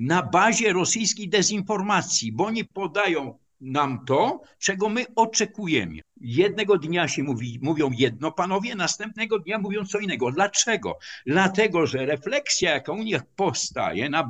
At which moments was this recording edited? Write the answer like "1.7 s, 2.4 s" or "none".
6.0 s